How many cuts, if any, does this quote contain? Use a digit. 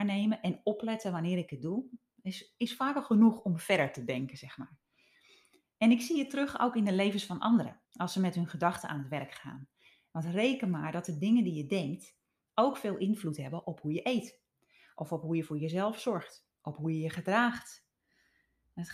2